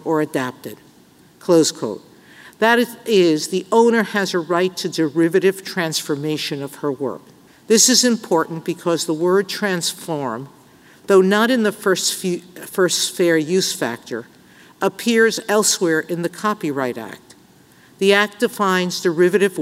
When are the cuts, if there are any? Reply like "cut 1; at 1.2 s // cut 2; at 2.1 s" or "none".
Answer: cut 1; at 7.5 s